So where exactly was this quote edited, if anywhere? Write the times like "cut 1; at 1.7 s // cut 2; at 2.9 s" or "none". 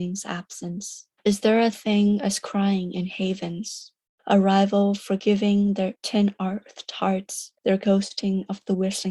cut 1; at 1.2 s